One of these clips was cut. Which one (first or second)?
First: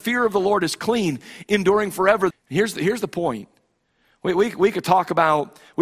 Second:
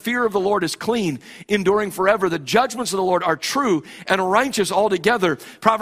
first